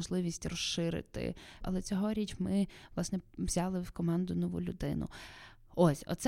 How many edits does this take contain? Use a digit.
1